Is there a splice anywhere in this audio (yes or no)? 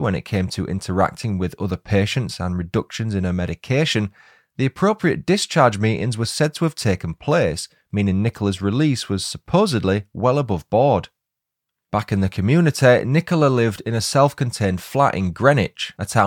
no